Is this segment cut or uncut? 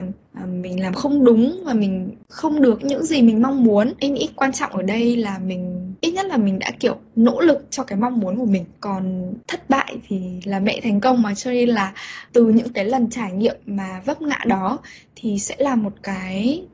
cut